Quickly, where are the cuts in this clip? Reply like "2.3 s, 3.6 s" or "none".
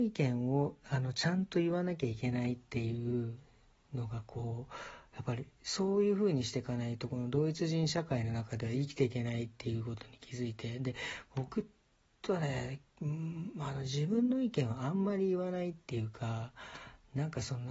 none